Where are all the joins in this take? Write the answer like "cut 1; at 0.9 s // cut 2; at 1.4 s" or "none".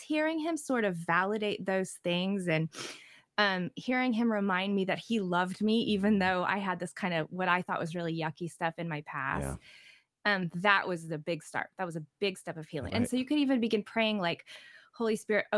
cut 1; at 12.9 s